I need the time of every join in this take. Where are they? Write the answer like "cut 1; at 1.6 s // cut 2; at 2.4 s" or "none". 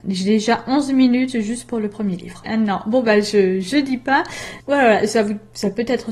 cut 1; at 2.4 s // cut 2; at 4.6 s